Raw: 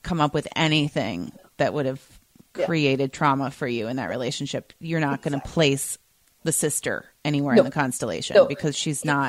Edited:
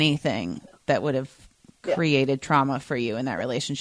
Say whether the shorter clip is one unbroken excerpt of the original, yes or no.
yes